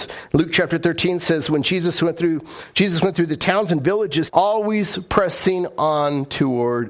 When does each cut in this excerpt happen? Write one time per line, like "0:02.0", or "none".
0:04.3